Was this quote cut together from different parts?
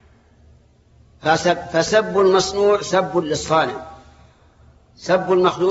no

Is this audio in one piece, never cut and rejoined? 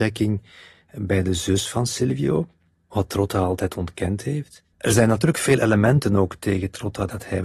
no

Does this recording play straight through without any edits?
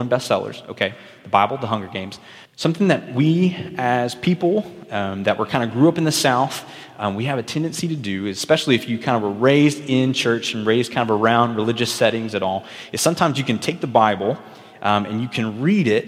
no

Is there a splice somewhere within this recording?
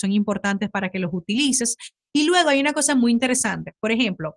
no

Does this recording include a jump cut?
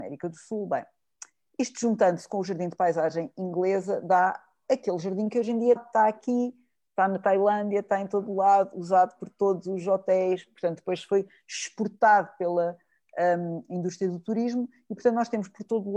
yes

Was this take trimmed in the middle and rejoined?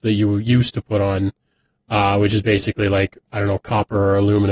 yes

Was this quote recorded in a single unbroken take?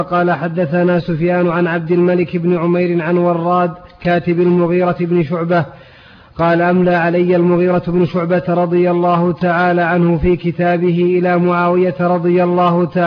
yes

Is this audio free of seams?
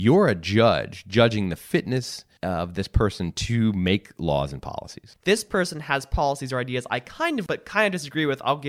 no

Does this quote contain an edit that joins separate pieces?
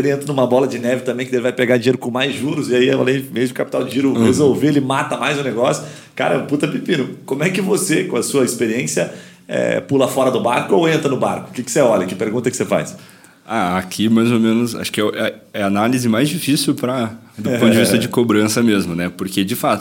no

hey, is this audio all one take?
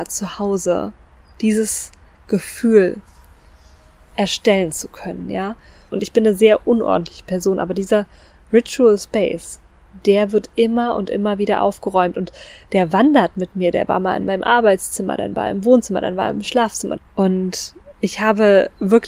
no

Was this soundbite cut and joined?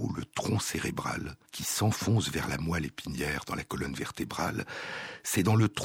yes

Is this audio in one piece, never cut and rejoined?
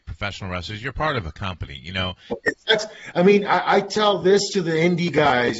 no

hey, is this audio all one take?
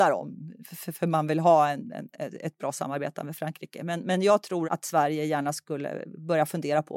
no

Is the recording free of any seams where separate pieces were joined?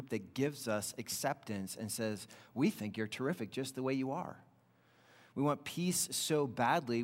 yes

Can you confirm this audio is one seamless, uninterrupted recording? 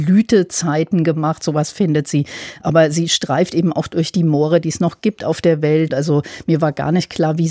no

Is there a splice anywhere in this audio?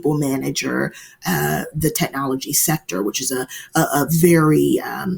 yes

